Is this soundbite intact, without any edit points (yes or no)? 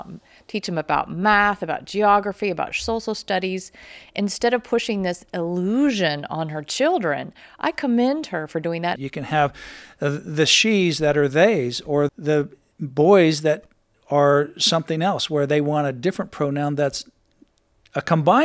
no